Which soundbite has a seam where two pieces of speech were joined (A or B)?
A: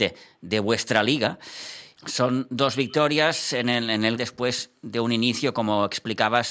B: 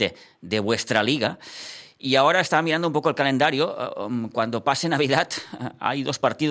A